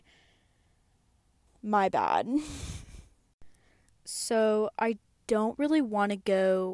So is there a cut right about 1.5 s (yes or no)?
yes